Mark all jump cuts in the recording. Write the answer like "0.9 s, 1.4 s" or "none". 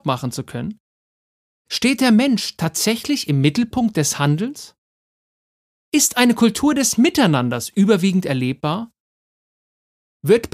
none